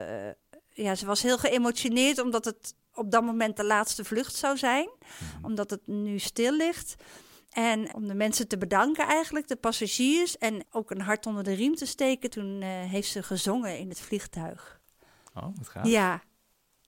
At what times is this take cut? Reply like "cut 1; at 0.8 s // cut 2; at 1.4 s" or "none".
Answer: cut 1; at 7.9 s